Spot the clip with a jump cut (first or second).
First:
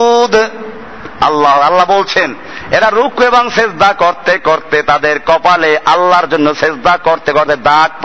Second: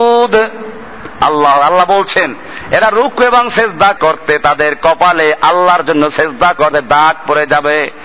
second